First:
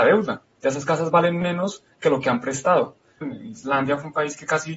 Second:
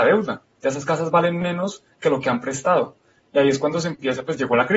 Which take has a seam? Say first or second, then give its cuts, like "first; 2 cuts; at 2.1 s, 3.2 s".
first; 1 cut; at 3.2 s